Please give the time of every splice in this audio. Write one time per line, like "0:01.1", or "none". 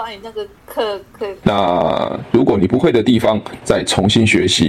0:01.4
0:03.6